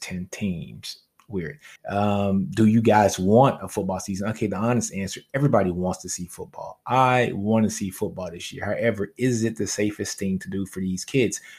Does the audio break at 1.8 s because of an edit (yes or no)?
yes